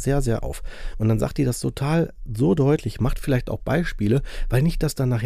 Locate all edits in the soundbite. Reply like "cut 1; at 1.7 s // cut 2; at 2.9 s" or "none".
none

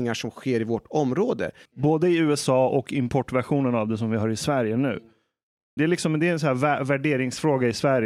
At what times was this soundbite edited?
cut 1; at 1.7 s // cut 2; at 5.8 s

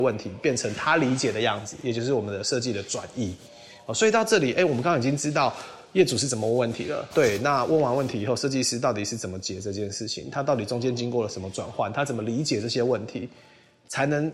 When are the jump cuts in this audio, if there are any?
cut 1; at 7.1 s

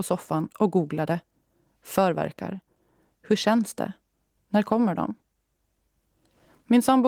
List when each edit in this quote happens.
none

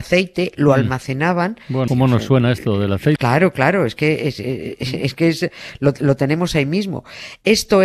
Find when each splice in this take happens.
cut 1; at 1.9 s // cut 2; at 3.2 s

